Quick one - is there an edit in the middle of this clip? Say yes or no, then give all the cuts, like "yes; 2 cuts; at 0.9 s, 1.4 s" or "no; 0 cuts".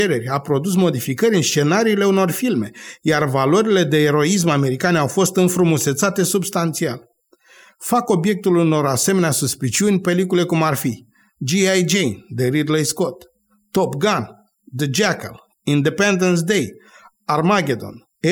no; 0 cuts